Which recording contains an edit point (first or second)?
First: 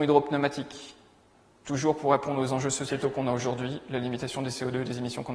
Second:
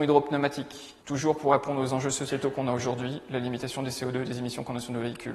second